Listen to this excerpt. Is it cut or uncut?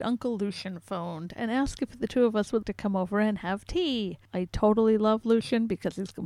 cut